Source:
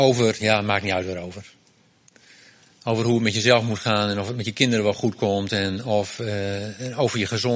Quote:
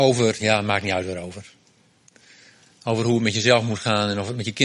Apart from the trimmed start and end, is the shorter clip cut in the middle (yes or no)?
no